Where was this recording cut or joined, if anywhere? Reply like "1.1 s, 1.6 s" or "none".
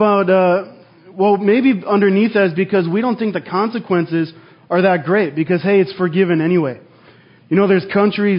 none